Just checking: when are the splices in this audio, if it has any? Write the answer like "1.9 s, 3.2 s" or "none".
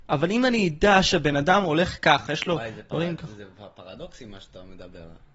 2.3 s